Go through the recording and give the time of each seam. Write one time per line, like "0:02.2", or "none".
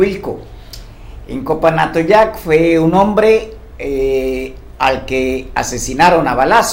0:01.3

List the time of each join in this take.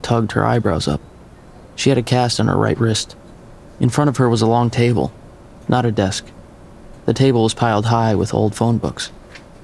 none

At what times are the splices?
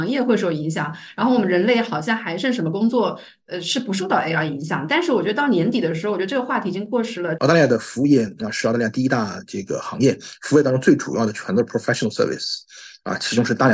0:07.3

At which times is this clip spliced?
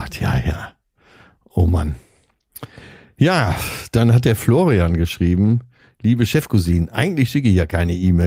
none

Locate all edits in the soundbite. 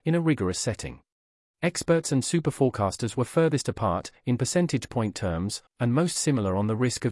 0:01.5
0:05.7

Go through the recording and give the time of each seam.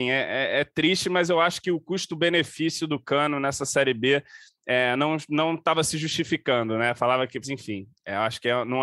0:07.4

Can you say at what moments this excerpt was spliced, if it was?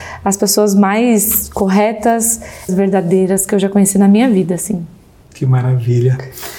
0:02.7
0:05.2

